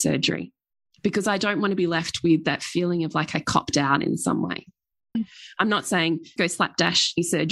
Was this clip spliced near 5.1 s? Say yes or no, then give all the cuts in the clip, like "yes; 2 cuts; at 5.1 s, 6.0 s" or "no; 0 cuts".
yes; 2 cuts; at 5.1 s, 6.4 s